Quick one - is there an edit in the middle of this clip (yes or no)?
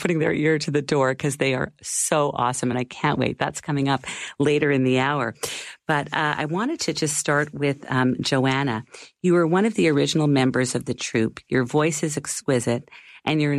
no